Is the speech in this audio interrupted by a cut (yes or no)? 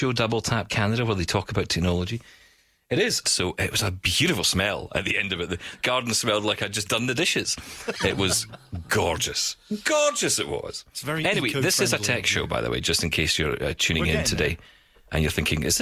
yes